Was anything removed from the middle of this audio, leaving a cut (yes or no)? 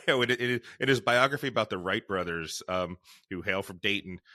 no